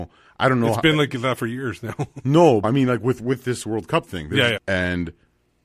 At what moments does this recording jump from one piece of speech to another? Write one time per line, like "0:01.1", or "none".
0:02.6
0:04.6

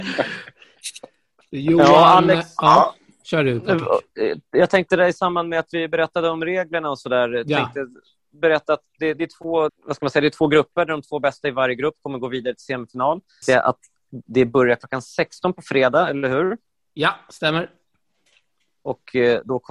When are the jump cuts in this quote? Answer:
0:09.7
0:13.4

